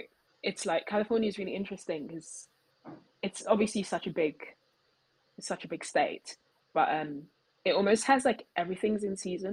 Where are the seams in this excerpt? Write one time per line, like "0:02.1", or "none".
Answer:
none